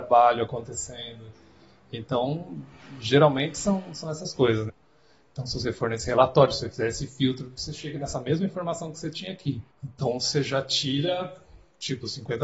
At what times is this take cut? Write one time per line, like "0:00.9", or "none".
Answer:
0:04.7
0:09.7